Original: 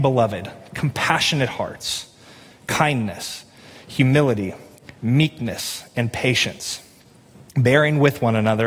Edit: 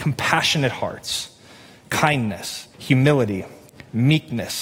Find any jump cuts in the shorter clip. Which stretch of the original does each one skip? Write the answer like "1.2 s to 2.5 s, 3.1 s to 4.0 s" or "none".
3.5 s to 3.8 s